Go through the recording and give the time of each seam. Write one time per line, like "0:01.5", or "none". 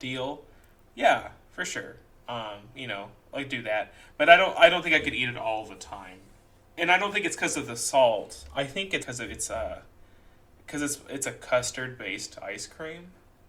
0:09.0

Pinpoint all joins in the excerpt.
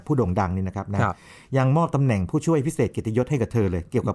none

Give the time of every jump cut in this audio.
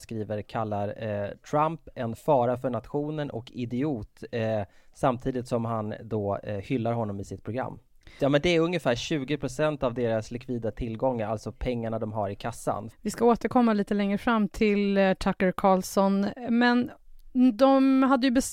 0:08.2
0:12.9

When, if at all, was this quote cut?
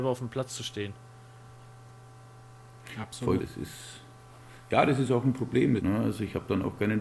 0:03.4
0:05.8

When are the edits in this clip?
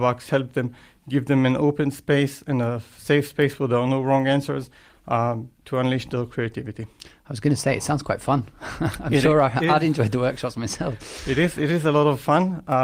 none

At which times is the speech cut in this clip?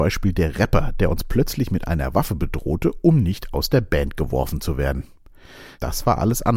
none

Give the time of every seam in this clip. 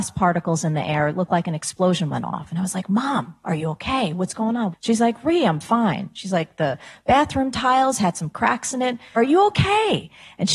0:04.7
0:09.2

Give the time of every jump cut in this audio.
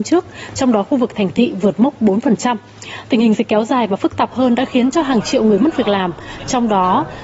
none

